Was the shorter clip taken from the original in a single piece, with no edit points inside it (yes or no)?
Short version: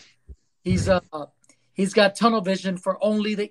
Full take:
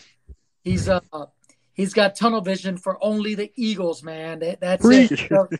yes